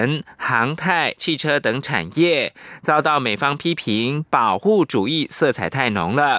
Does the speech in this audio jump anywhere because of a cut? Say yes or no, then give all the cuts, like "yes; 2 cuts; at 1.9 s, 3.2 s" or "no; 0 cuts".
yes; 1 cut; at 1.2 s